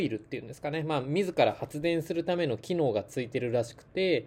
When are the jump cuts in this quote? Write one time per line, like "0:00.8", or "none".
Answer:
none